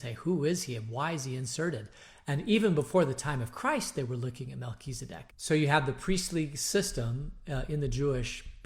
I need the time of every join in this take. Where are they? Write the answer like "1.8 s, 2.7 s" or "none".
5.3 s